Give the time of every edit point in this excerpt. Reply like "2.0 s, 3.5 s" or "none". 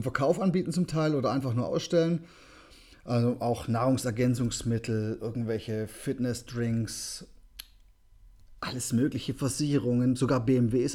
8.6 s